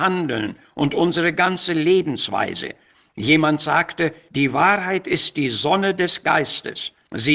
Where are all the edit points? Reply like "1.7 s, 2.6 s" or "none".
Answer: none